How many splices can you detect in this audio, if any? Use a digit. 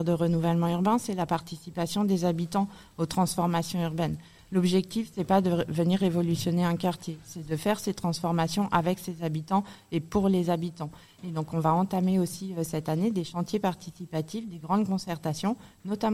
0